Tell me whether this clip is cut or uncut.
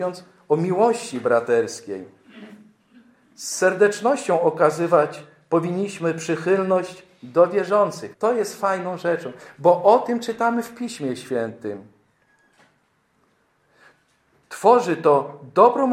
cut